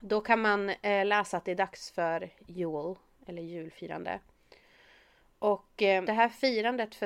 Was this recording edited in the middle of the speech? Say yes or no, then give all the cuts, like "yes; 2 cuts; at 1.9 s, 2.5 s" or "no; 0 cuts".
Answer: yes; 1 cut; at 6.0 s